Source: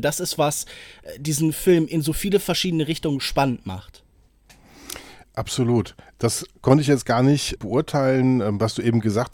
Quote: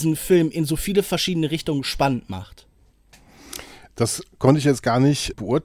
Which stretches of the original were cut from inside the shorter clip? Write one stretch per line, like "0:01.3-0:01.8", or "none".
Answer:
0:05.2-0:06.1